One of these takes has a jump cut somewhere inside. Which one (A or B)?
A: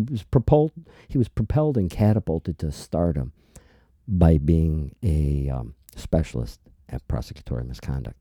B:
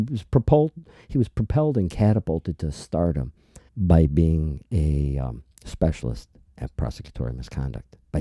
B